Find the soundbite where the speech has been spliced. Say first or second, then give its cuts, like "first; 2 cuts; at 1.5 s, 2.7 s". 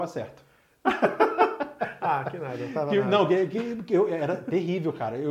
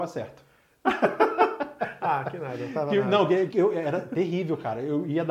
second; 1 cut; at 3.5 s